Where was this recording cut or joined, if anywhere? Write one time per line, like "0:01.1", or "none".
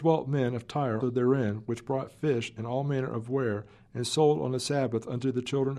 0:01.0